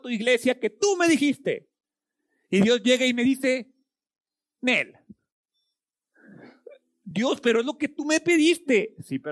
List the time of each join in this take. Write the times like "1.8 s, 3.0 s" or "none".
none